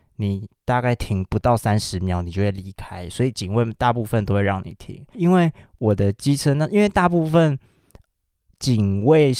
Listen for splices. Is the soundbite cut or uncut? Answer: cut